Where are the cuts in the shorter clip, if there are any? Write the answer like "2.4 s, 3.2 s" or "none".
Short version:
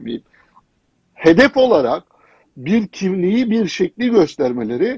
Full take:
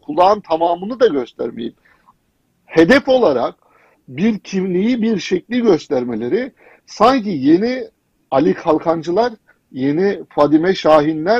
none